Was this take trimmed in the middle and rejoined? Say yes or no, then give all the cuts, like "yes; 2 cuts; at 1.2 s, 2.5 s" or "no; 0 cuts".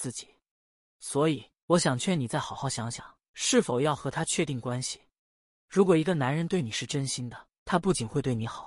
no; 0 cuts